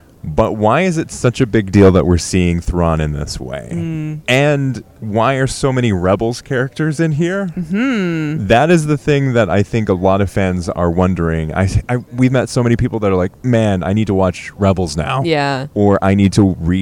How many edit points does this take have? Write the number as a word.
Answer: zero